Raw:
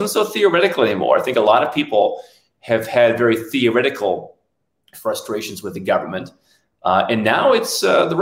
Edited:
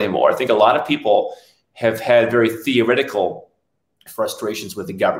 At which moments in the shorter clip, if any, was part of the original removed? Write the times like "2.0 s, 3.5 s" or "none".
none